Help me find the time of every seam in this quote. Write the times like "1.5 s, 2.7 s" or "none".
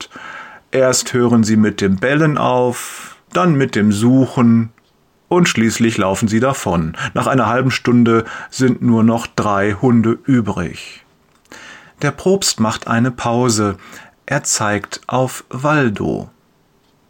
3.2 s